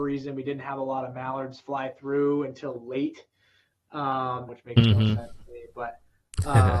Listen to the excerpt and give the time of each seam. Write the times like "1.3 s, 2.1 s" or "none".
4.5 s